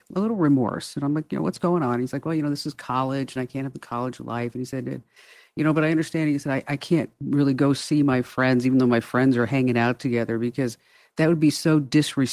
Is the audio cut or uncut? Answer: uncut